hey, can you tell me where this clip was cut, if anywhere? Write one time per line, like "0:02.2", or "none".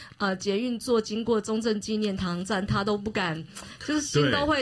0:02.7